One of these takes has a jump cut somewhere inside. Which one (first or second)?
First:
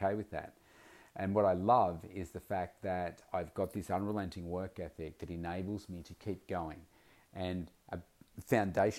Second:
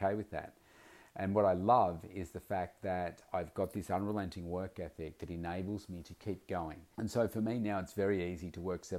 second